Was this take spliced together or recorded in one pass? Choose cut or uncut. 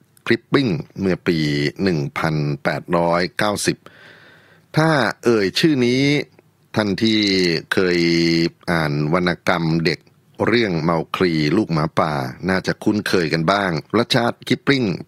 cut